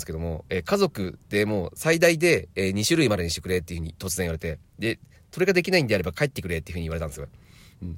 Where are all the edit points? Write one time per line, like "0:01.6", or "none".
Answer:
none